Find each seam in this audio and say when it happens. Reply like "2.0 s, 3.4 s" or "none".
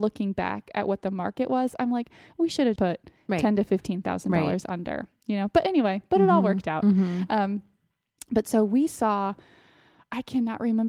2.8 s